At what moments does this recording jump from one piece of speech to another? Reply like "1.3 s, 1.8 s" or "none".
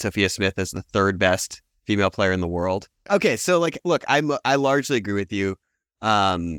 3.1 s